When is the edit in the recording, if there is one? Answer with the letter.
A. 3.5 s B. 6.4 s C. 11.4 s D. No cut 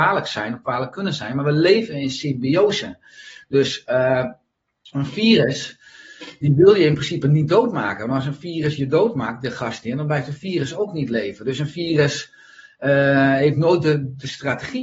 D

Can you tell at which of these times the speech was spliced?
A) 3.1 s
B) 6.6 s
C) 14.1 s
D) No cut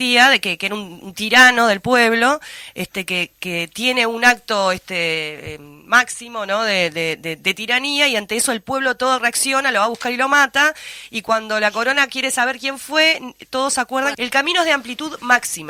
C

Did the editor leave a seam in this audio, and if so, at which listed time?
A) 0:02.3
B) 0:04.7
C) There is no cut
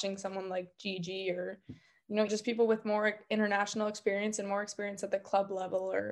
A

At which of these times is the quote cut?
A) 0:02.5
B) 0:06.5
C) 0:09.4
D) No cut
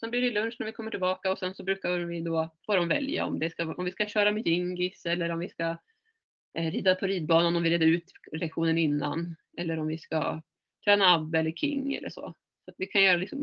A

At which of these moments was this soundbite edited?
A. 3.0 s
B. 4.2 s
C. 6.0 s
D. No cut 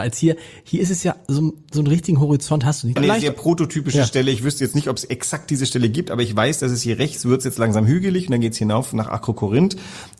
A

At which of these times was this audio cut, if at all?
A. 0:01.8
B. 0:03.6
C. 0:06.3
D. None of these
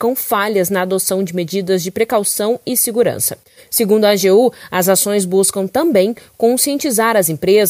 B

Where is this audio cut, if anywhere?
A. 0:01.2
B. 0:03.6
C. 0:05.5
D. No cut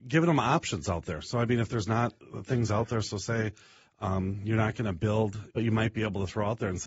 C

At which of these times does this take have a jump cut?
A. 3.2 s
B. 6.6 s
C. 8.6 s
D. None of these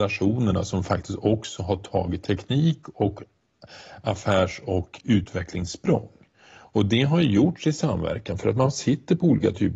D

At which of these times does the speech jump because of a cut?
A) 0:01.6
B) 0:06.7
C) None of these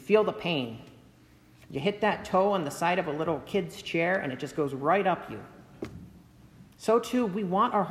B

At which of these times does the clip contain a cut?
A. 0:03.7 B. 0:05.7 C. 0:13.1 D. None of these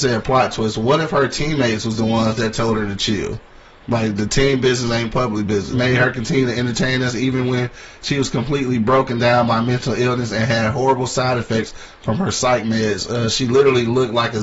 B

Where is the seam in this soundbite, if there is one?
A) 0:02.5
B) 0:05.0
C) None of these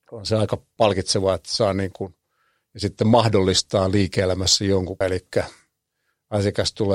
B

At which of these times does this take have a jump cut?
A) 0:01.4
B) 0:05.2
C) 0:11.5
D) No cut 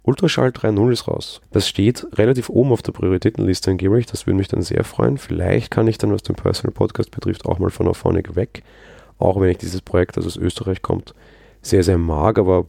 A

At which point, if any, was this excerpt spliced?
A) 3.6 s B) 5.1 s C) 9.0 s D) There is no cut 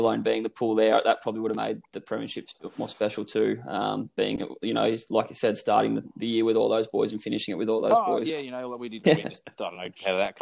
C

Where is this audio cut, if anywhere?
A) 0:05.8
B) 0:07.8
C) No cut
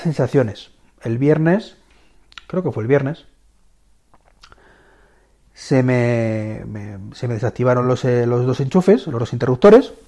C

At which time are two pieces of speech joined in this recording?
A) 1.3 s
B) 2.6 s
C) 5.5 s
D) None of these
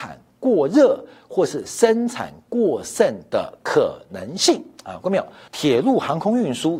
C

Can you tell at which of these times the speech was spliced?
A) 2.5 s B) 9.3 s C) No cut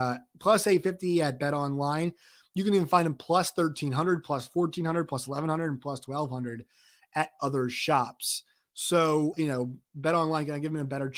B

